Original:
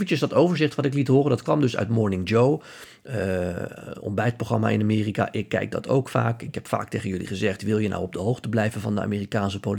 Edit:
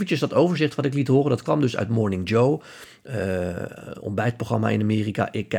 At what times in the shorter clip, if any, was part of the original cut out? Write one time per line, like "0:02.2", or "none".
none